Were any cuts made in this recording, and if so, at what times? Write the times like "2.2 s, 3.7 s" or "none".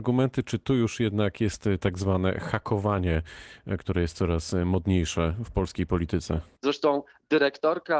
6.6 s